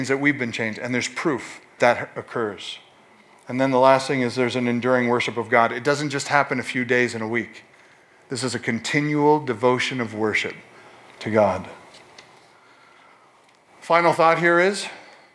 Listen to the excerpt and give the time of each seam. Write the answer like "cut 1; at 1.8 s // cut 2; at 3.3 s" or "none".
cut 1; at 1.8 s